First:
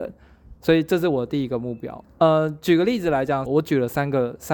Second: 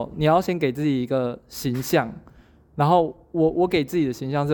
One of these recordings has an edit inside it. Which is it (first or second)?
first